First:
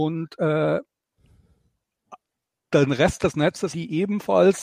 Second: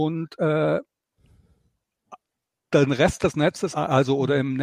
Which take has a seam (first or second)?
first